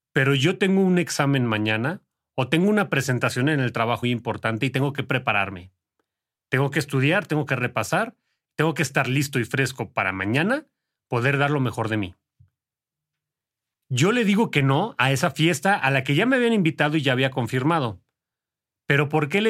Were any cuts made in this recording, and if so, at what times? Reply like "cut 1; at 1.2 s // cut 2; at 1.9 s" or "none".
cut 1; at 4.0 s